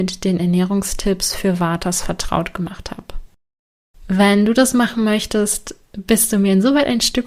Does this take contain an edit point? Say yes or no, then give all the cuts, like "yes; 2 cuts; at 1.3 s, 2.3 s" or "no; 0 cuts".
no; 0 cuts